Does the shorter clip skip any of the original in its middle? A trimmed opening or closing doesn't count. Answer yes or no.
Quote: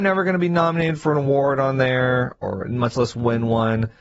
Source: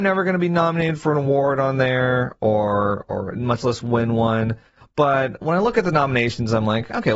yes